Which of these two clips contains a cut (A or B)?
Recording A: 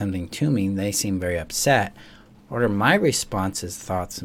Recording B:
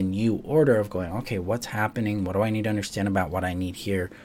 A